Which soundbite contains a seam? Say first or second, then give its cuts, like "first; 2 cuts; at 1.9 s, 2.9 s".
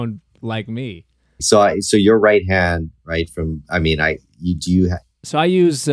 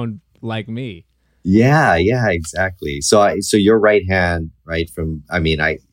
first; 1 cut; at 1.4 s